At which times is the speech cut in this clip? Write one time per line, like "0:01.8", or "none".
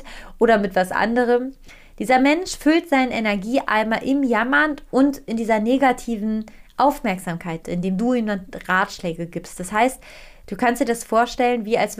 0:07.6